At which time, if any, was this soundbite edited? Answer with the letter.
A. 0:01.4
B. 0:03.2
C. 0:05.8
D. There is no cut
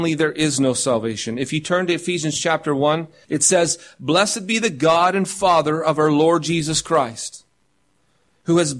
B